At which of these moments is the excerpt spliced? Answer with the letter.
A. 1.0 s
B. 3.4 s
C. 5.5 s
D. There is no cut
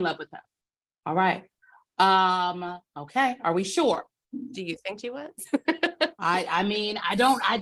A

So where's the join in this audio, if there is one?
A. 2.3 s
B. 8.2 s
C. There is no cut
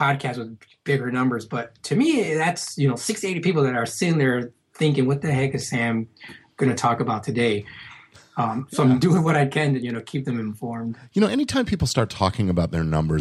C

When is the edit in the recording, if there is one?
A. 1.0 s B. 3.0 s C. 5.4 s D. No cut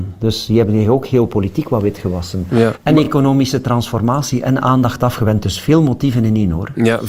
D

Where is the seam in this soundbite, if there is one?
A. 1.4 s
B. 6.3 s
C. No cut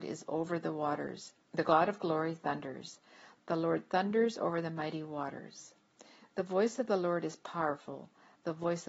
A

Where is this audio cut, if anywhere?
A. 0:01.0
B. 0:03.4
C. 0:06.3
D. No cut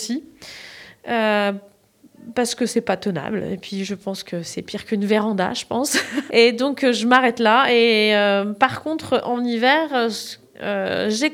C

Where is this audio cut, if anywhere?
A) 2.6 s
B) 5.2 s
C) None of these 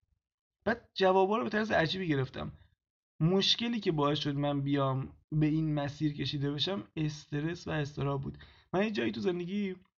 B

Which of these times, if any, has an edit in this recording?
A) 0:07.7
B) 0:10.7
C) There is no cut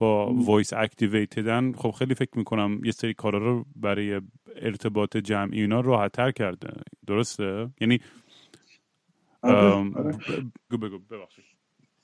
B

